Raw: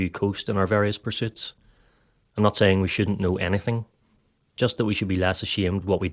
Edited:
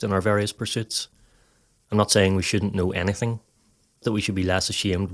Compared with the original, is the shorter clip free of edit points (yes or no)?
no